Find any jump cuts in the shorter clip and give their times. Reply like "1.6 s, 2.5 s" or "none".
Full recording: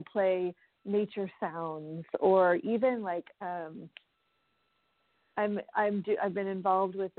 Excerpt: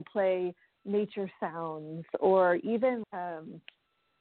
3.0 s